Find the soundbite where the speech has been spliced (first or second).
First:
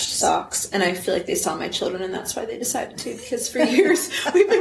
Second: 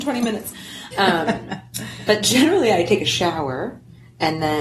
second